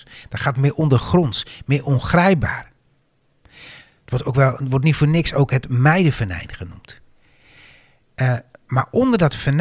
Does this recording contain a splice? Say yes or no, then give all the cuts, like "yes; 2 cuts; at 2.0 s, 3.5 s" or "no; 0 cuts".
no; 0 cuts